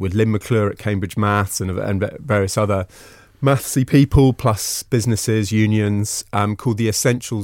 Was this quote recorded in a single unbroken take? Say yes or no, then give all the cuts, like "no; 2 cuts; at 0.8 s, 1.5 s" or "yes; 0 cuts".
yes; 0 cuts